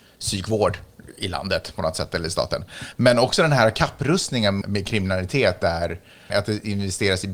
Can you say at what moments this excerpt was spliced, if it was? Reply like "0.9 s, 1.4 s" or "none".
4.6 s, 6.3 s

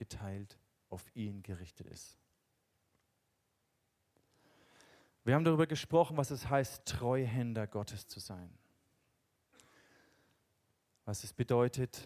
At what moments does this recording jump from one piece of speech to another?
none

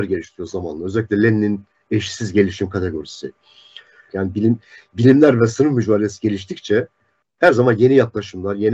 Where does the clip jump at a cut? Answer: 4.1 s

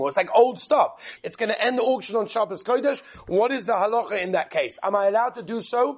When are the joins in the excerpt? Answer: 1.2 s

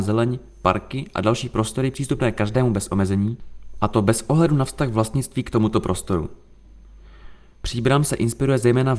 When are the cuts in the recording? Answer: 7.5 s

